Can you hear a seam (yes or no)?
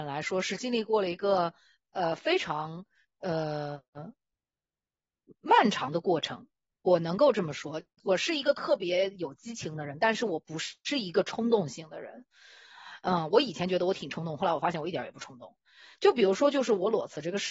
no